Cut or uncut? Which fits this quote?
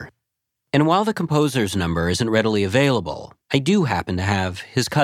cut